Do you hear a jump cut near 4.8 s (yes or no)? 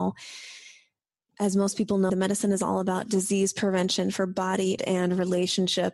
yes